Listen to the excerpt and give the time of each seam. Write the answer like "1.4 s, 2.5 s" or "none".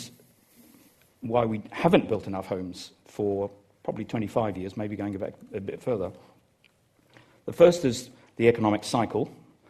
none

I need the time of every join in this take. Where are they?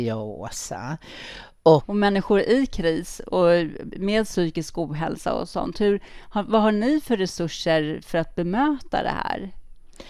1.8 s

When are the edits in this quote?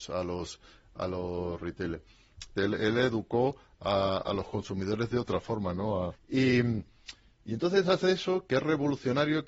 2.6 s, 6.1 s

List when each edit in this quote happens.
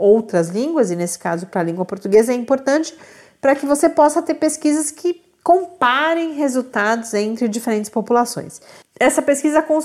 8.8 s

